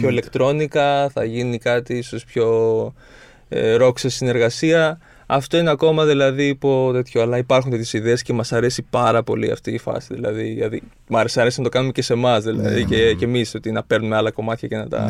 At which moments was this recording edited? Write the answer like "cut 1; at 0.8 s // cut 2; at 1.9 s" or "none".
none